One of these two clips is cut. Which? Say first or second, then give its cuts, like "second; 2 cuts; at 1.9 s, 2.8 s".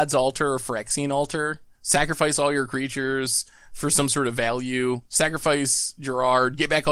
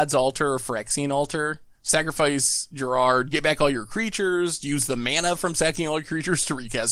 second; 1 cut; at 1.8 s